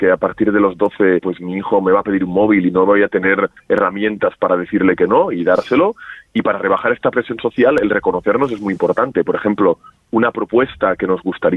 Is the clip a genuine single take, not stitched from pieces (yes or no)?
no